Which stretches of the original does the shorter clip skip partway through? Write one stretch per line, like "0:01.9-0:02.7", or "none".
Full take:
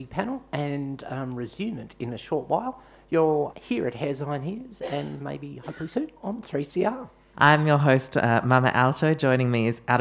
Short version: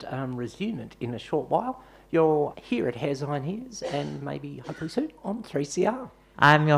none